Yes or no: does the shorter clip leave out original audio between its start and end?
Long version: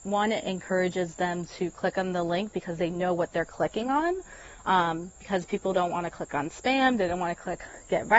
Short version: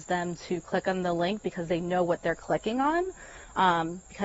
no